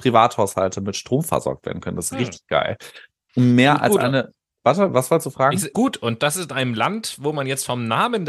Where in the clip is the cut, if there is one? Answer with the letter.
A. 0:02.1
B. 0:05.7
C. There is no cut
B